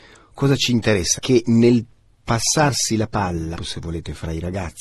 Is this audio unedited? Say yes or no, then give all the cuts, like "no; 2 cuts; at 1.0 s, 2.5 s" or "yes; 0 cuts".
no; 2 cuts; at 1.2 s, 3.6 s